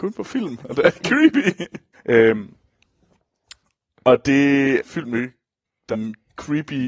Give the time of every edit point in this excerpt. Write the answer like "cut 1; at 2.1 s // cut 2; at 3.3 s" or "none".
cut 1; at 1.9 s // cut 2; at 4.8 s // cut 3; at 5.9 s